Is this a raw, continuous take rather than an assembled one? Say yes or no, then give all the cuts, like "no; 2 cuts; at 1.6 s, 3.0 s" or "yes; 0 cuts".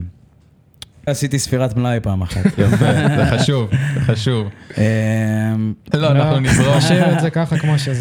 no; 2 cuts; at 1.1 s, 5.9 s